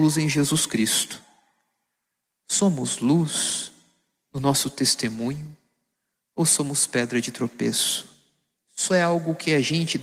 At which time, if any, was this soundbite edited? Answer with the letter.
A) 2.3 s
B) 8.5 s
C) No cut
B